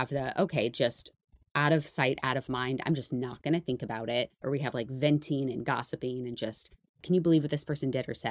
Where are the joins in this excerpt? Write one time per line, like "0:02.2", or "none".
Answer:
0:04.4